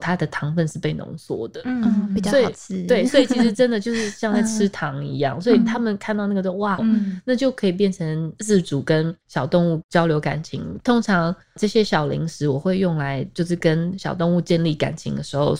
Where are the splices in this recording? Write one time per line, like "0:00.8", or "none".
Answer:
0:06.8
0:10.8